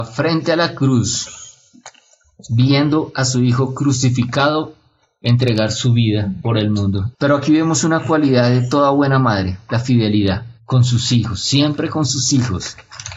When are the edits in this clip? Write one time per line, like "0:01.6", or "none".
0:07.1
0:10.6